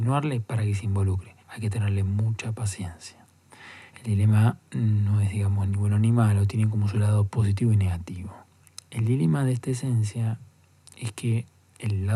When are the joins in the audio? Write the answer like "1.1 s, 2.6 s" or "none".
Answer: 1.4 s, 3.9 s